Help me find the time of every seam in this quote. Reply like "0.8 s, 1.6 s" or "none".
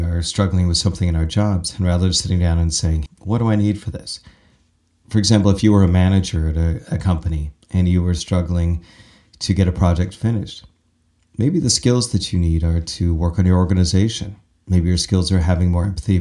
3.1 s